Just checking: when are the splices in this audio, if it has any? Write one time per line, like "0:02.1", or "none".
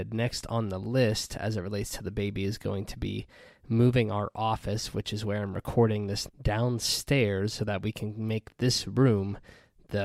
0:06.3
0:07.6

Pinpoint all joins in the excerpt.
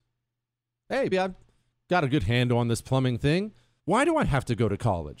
0:01.1
0:03.8

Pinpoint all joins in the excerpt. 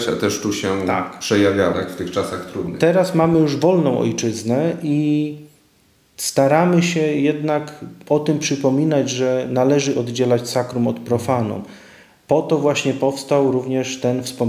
0:01.7

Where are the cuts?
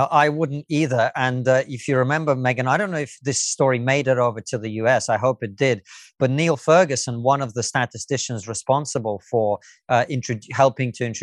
none

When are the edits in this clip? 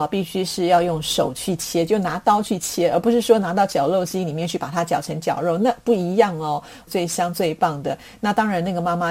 0:06.9

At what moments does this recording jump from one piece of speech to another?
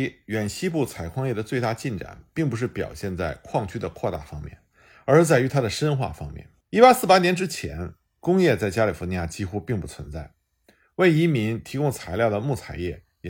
0:06.6

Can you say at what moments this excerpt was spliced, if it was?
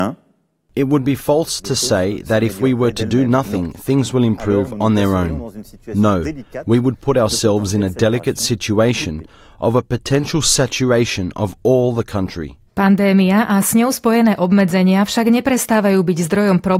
0:12.7

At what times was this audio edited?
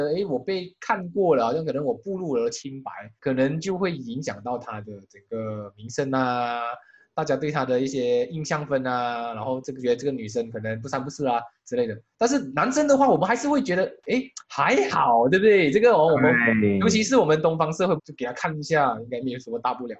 0:18.0

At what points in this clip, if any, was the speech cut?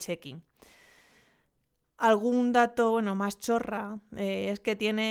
none

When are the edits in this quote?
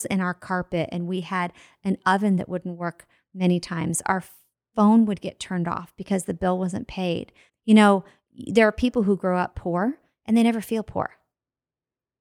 0:07.5

